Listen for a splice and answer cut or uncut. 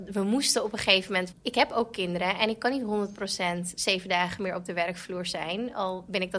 cut